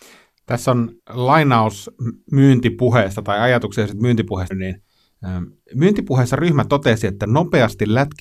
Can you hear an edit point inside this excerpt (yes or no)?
yes